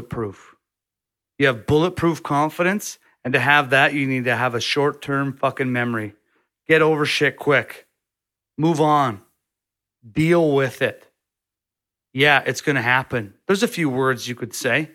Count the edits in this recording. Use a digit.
0